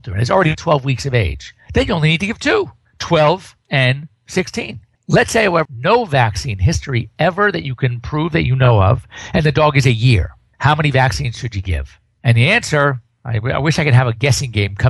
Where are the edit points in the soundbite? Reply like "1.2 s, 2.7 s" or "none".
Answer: 5.7 s